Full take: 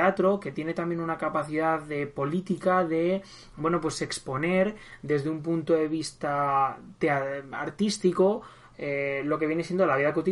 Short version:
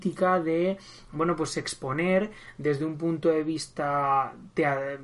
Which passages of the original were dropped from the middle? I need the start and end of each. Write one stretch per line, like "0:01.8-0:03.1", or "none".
none